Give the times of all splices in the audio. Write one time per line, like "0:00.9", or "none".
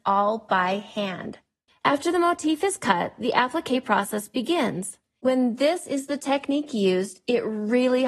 0:01.7
0:05.2